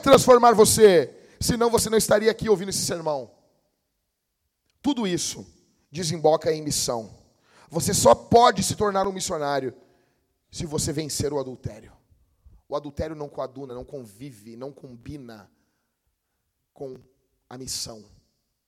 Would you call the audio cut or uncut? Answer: uncut